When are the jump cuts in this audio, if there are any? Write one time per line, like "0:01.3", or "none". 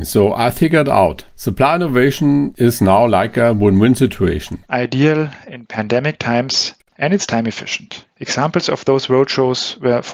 0:04.6